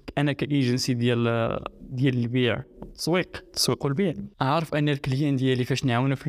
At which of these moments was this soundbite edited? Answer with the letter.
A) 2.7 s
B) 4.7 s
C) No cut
C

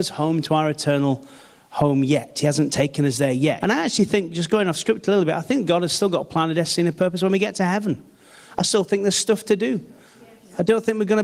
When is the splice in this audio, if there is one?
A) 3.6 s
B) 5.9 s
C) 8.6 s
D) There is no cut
A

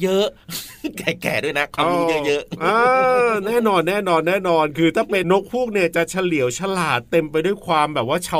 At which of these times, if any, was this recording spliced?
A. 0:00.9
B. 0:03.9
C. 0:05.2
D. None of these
C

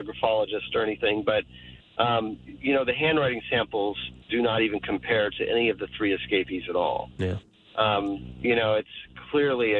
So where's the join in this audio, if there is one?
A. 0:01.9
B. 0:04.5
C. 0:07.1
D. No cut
D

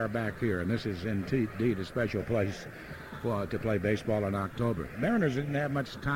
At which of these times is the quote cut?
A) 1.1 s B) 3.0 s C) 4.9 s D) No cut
D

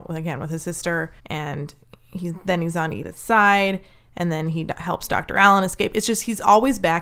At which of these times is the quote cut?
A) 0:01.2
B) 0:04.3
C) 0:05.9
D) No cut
A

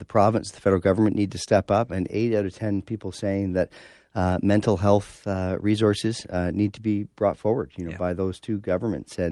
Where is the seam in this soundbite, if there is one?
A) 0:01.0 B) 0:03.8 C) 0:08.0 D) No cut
D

